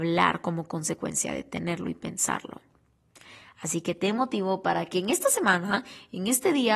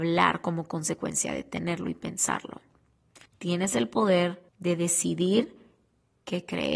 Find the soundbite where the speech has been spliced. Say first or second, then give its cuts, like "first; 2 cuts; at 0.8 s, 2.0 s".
second; 2 cuts; at 3.3 s, 4.5 s